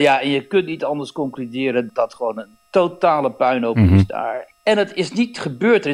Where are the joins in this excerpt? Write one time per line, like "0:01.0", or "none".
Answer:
0:01.9
0:04.5